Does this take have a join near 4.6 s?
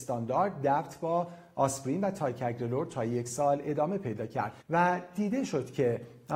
yes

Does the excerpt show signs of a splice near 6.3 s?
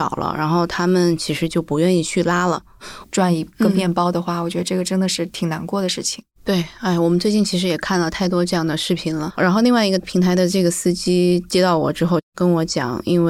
no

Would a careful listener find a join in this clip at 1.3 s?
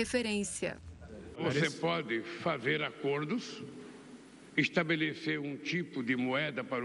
yes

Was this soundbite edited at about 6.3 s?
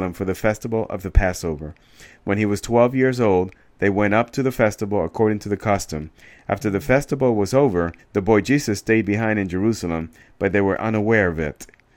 no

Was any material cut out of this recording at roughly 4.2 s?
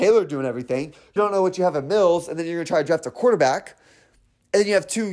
no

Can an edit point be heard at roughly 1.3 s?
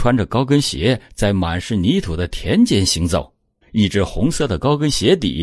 no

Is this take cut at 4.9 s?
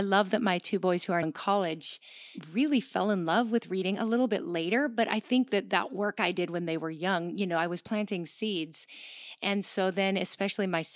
no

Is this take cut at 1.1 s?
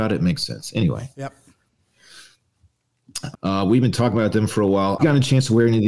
no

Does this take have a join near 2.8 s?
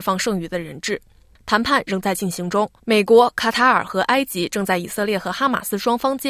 yes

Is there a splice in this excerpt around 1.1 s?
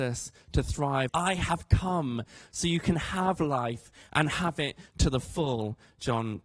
yes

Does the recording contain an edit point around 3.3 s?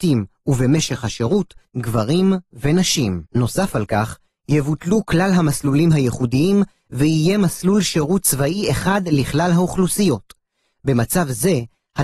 yes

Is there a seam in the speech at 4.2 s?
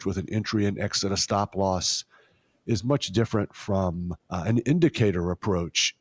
yes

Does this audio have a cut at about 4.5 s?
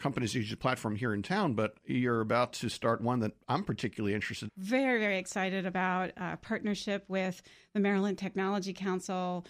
yes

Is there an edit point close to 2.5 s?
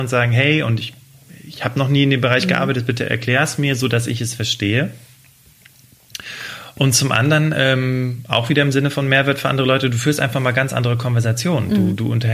no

